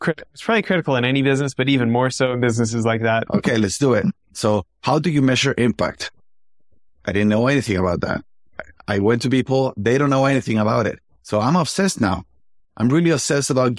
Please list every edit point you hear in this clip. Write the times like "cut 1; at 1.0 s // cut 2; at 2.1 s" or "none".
cut 1; at 3.3 s